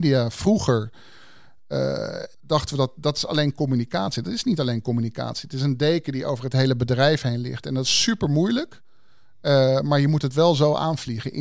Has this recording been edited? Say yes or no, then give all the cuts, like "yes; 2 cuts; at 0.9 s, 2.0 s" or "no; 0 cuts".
yes; 1 cut; at 2.3 s